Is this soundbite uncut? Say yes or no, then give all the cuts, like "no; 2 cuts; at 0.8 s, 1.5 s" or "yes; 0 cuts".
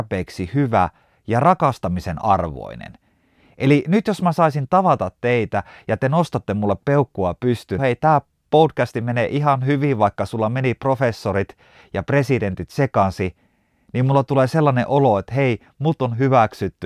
no; 1 cut; at 7.8 s